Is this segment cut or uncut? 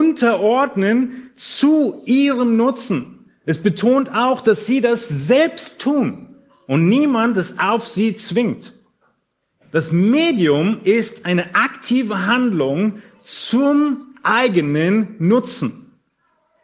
cut